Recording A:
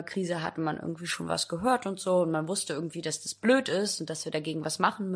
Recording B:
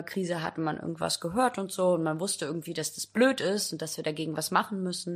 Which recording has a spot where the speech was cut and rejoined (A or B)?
B